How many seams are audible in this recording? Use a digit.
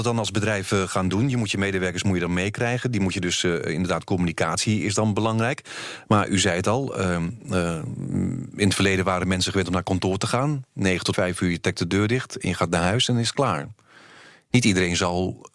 1